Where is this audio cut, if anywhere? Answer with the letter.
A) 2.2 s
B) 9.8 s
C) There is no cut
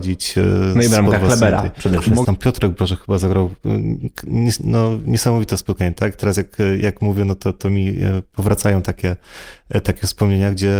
A